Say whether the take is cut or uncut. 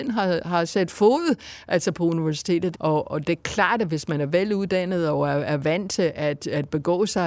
cut